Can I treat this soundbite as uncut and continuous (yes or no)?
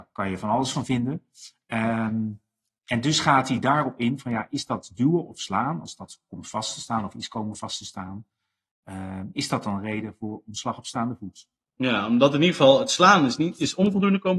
yes